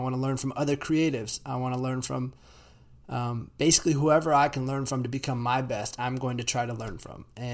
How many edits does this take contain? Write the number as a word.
zero